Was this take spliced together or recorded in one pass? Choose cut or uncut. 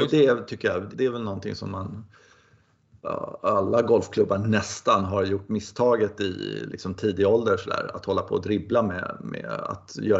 cut